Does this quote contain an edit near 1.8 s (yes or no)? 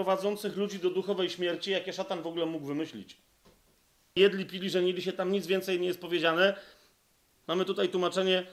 no